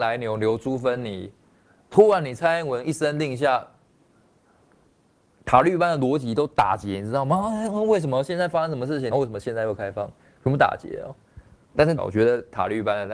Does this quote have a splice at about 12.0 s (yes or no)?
yes